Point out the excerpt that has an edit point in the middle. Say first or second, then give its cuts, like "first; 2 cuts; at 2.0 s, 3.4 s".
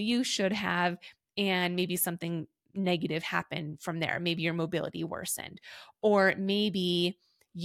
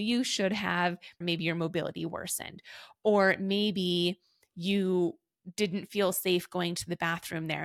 second; 1 cut; at 1.2 s